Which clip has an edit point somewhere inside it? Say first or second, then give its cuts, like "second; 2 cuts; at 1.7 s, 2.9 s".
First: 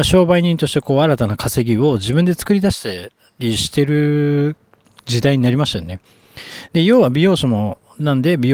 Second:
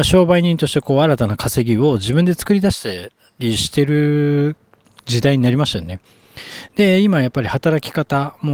second; 1 cut; at 6.7 s